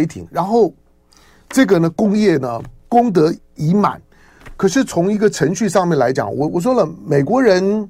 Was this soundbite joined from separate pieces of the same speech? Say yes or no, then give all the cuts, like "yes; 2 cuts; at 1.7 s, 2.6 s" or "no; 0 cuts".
yes; 1 cut; at 3.4 s